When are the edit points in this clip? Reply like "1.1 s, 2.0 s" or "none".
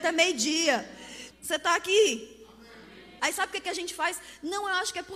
1.3 s, 3.2 s

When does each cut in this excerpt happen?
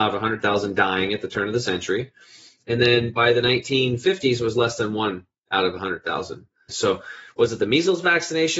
6.7 s

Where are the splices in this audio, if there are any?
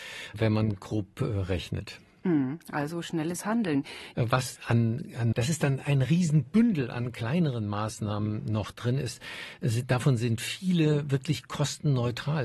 4.1 s, 5.3 s

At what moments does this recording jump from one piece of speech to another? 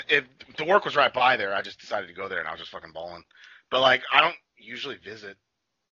none

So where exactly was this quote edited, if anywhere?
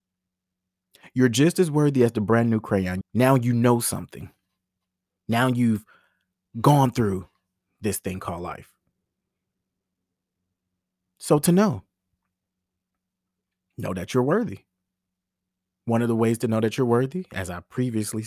3.0 s

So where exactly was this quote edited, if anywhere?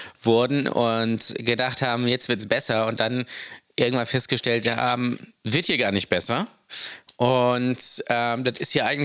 none

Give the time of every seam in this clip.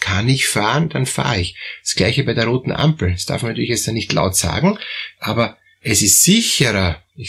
none

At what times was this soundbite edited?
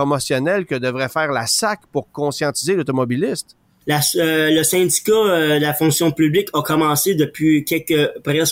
3.8 s

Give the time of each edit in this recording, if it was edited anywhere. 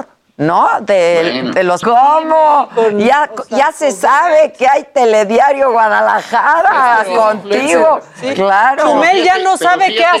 1.8 s

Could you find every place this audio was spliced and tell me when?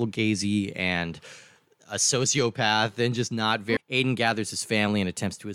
3.8 s

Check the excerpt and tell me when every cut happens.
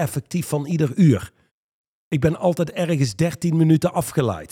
none

